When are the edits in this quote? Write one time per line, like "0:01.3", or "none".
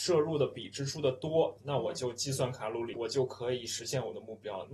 0:01.6
0:02.9